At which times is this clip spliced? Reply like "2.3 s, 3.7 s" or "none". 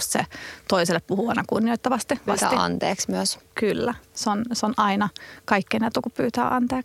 2.3 s